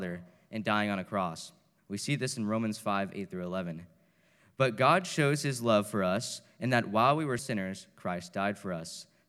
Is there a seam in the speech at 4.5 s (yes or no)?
no